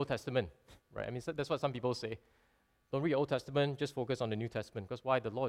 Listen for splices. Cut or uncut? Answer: uncut